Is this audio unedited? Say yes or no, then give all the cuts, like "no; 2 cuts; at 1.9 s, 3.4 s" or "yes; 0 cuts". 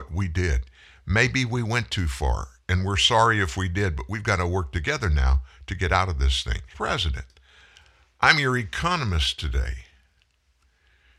no; 1 cut; at 6.7 s